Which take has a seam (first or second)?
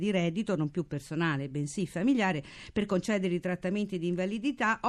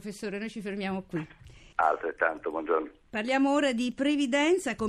second